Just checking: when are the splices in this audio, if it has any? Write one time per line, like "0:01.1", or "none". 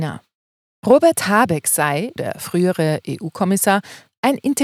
0:02.2